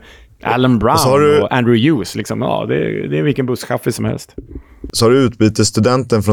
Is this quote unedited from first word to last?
yes; 0 cuts

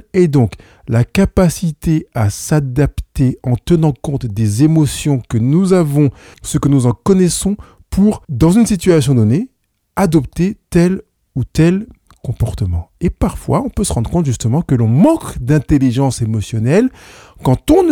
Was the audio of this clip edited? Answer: yes; 2 cuts; at 6.3 s, 8.2 s

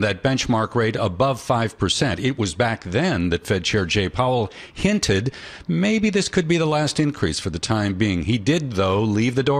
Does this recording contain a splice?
no; 0 cuts

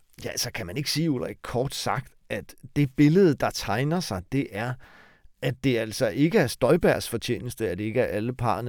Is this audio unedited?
yes; 0 cuts

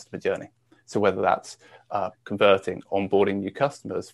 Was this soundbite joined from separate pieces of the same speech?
yes; 1 cut; at 2.1 s

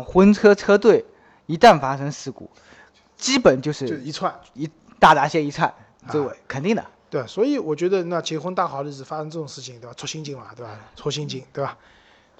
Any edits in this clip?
no; 0 cuts

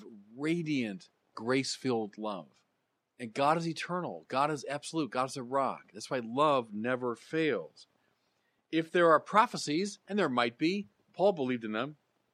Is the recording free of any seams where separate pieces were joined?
no; 1 cut; at 3.1 s

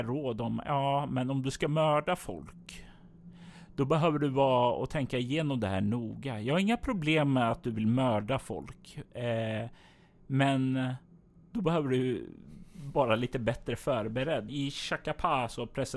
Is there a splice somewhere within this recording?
yes; 1 cut; at 14.5 s

